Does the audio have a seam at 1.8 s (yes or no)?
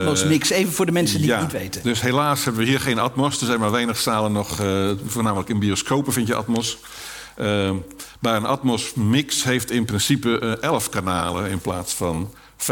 no